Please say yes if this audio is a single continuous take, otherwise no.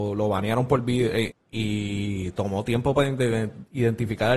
no